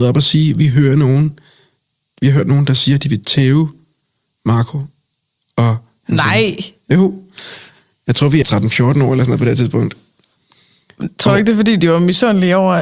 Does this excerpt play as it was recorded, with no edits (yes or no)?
no